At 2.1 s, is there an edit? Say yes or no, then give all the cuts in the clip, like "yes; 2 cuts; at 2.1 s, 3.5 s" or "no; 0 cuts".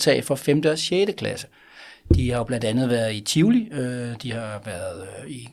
no; 0 cuts